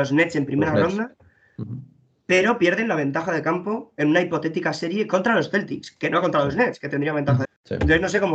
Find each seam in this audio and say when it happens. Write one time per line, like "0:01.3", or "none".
0:07.4